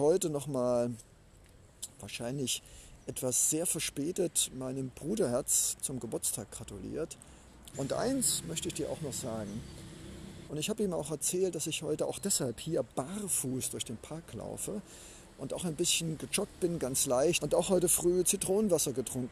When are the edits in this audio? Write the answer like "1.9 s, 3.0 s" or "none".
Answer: 7.7 s, 10.5 s, 17.4 s